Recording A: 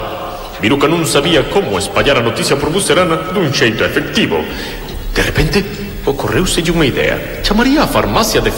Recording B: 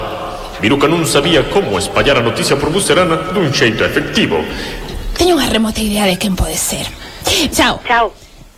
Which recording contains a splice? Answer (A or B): B